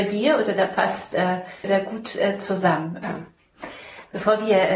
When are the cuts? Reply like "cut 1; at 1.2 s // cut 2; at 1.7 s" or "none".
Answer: cut 1; at 1.6 s // cut 2; at 3.0 s